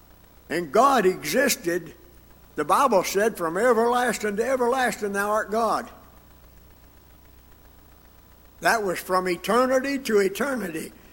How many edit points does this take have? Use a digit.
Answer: 0